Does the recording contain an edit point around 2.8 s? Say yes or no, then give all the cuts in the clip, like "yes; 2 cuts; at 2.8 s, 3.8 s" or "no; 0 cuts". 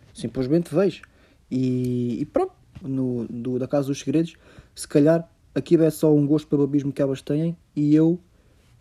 yes; 1 cut; at 2.8 s